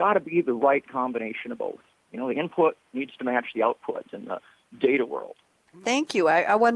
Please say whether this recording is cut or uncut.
cut